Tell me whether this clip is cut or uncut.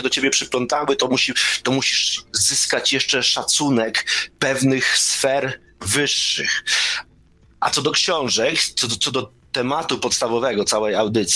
uncut